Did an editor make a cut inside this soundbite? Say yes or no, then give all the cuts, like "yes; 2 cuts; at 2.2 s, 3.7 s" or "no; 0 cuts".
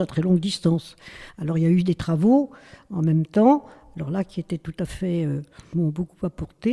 yes; 1 cut; at 5.7 s